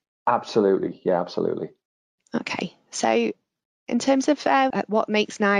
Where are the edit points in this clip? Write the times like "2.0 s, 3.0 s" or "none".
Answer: 4.7 s